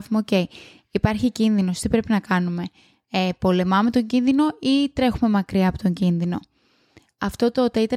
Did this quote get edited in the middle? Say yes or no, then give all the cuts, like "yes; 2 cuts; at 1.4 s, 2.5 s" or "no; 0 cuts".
no; 0 cuts